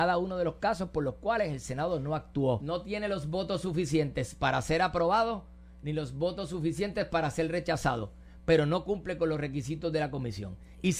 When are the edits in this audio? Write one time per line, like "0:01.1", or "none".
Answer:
0:02.6